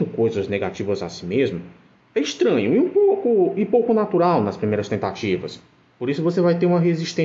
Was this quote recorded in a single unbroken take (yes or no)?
yes